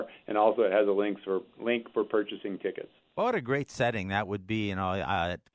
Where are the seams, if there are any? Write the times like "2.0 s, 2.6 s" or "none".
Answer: none